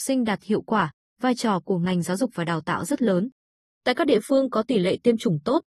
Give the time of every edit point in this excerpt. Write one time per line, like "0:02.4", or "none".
none

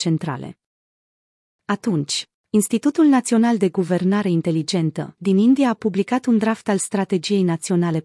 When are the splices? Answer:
0:01.5
0:05.2

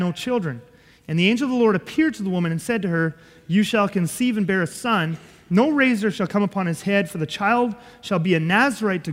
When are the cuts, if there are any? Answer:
none

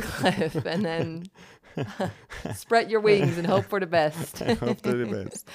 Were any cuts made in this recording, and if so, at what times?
none

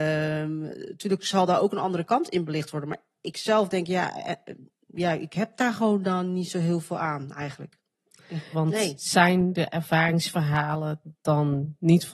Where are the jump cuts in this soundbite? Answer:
0:08.5

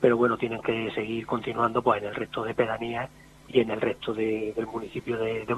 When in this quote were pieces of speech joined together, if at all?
none

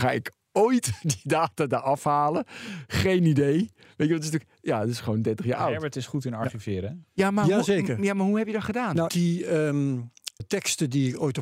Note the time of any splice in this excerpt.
0:09.1
0:10.4

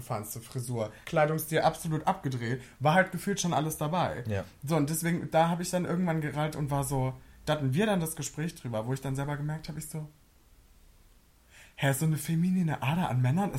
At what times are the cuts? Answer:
0:01.0

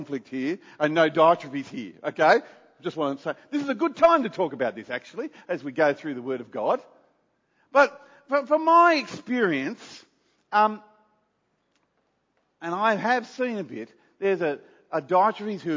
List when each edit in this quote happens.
none

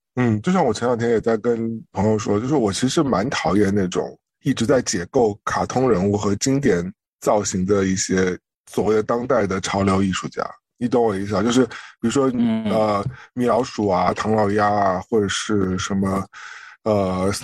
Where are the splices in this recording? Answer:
none

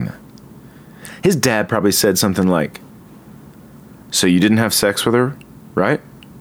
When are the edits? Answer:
none

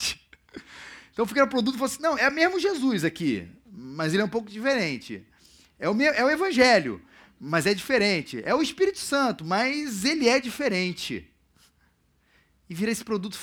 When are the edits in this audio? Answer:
0:02.2

